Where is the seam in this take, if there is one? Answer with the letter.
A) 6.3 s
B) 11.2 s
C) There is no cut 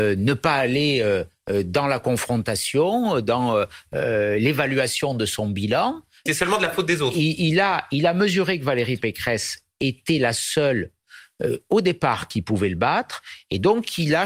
A